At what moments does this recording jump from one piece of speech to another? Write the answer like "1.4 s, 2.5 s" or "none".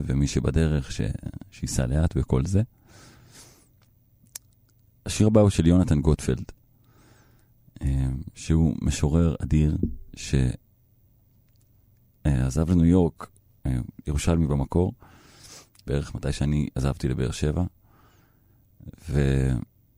15.9 s